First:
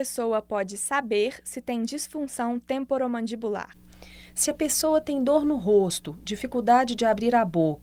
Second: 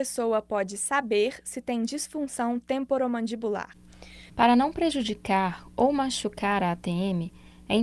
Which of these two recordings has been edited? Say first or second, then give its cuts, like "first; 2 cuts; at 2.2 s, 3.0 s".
second; 1 cut; at 4.3 s